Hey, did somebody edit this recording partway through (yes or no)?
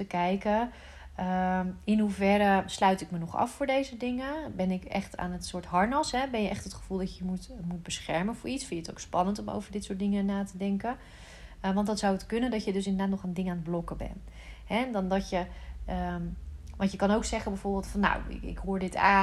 no